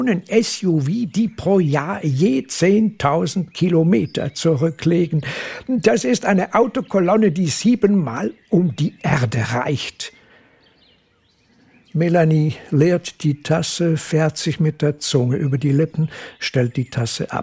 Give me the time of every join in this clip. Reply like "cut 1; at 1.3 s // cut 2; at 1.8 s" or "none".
none